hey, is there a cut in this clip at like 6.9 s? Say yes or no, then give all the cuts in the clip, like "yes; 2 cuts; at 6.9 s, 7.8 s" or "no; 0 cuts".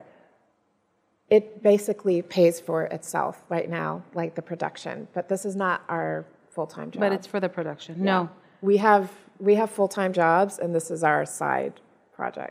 no; 0 cuts